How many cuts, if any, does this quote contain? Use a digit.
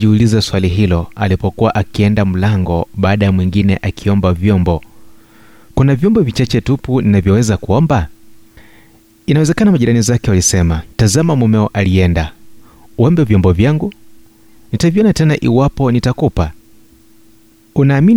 1